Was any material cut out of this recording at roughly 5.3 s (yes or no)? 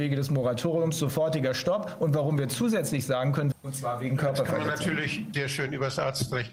yes